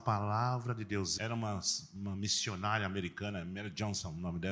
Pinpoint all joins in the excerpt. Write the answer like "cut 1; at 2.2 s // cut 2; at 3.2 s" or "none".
cut 1; at 1.2 s